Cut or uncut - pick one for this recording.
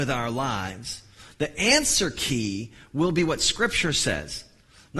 uncut